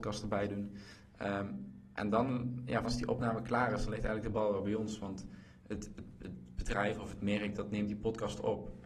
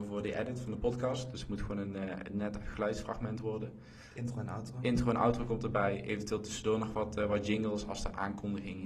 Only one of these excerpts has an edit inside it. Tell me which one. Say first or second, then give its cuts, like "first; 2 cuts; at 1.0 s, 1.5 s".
first; 1 cut; at 2.8 s